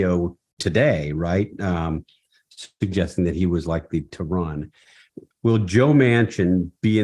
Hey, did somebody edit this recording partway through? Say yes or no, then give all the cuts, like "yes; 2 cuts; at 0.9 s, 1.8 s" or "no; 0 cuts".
yes; 1 cut; at 5.3 s